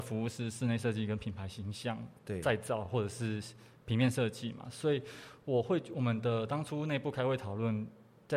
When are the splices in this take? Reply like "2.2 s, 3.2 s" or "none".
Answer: none